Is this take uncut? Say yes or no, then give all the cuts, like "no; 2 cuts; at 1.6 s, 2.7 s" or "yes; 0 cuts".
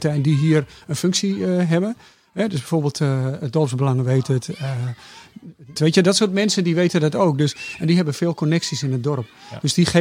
no; 1 cut; at 5.8 s